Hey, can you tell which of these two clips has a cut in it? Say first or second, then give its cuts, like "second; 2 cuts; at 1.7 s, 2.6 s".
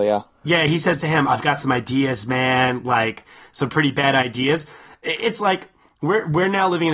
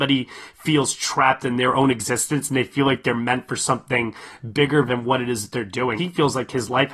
second; 1 cut; at 6.0 s